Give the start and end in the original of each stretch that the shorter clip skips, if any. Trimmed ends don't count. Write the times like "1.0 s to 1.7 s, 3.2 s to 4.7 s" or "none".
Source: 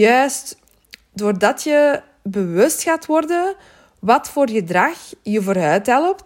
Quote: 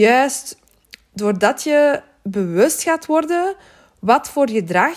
none